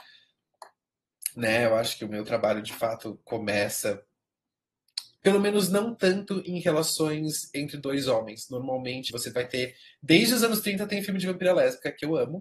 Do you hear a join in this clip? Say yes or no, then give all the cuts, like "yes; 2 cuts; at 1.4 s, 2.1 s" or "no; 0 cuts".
yes; 2 cuts; at 5.2 s, 9.1 s